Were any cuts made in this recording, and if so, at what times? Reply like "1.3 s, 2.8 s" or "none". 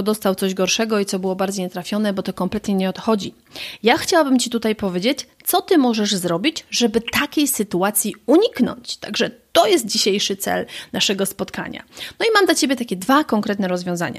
none